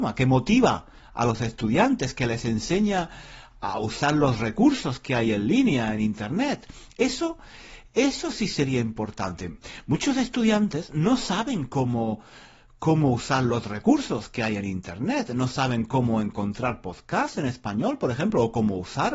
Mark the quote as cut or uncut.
uncut